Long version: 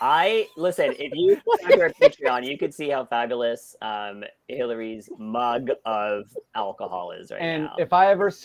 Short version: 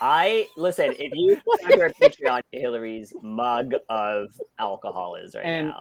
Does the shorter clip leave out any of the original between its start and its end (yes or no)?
yes